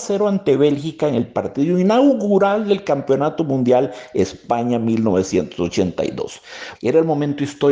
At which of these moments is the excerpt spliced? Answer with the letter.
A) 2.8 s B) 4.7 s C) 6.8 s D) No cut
C